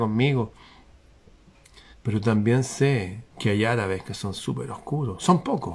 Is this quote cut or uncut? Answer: cut